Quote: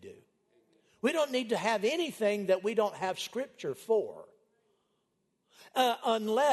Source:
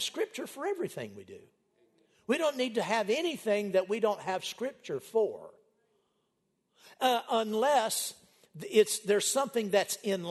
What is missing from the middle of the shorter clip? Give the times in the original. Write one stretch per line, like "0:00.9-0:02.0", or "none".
none